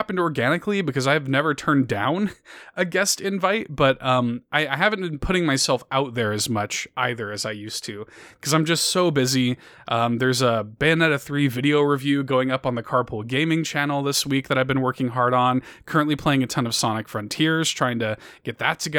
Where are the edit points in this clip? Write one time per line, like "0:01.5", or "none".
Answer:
none